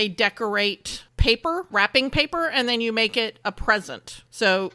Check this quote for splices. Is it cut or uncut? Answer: cut